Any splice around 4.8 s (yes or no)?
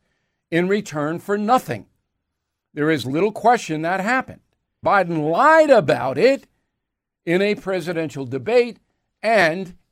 yes